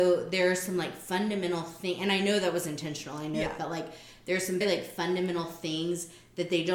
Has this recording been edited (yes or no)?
yes